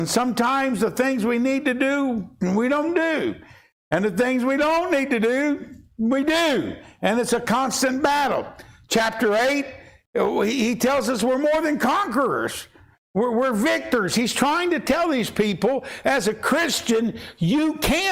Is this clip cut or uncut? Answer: uncut